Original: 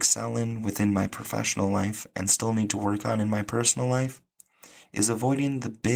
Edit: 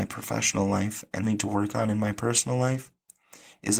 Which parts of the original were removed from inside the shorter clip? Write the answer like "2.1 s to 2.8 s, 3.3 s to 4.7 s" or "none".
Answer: 2.2 s to 2.5 s